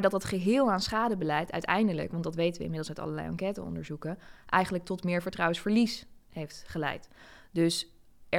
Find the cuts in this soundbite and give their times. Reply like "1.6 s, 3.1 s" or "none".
none